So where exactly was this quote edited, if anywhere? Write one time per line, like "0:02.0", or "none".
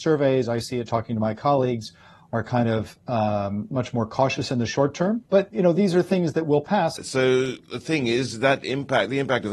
0:05.3
0:07.0